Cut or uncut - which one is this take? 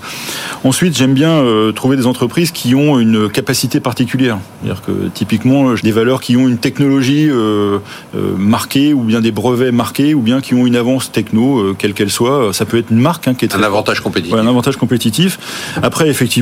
cut